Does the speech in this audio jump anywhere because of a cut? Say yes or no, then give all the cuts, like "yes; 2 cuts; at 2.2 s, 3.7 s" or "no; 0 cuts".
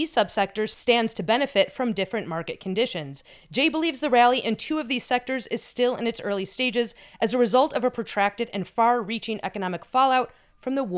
no; 0 cuts